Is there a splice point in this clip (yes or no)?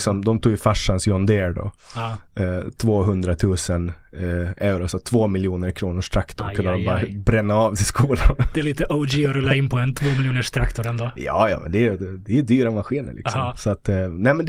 no